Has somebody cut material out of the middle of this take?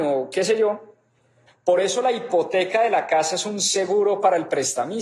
yes; 1 cut; at 1.5 s

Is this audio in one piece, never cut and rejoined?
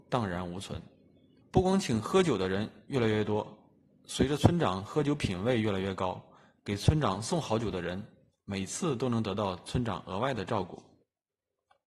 no; 1 cut; at 1.4 s

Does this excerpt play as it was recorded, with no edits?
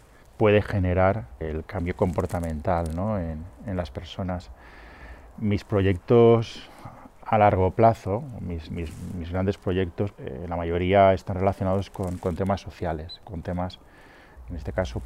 no; 1 cut; at 10.1 s

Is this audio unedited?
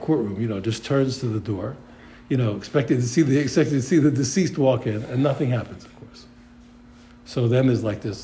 yes; 0 cuts

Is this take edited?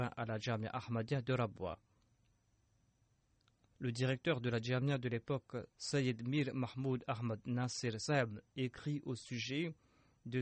yes; 2 cuts; at 3.7 s, 5.7 s

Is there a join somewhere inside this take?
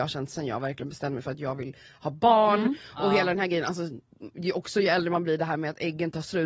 no; 0 cuts

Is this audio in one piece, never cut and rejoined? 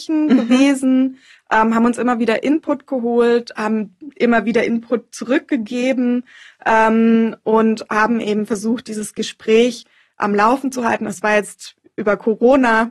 yes; 0 cuts

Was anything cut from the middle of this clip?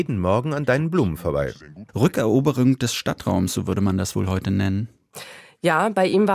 yes; 1 cut; at 1.9 s

